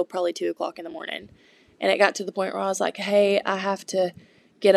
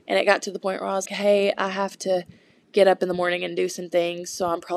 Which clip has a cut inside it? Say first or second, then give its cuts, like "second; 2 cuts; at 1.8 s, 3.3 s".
second; 1 cut; at 1.1 s